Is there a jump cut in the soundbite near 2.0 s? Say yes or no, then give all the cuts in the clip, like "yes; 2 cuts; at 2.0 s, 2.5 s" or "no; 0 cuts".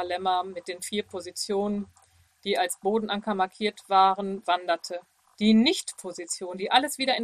no; 1 cut; at 5.2 s